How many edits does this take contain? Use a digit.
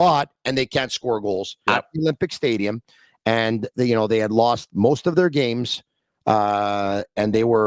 1